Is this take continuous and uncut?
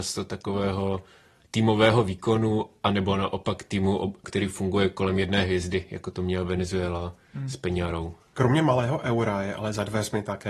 yes; 0 cuts

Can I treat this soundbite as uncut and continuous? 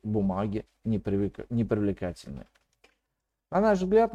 yes; 0 cuts

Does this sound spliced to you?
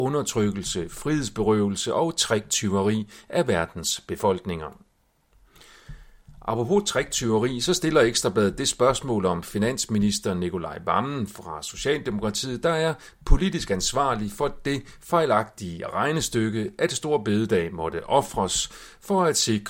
no; 0 cuts

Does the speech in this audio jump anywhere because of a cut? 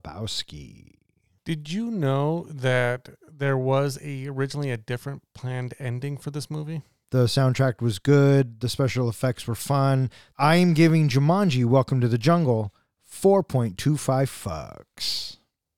yes; 2 cuts; at 7.0 s, 10.3 s

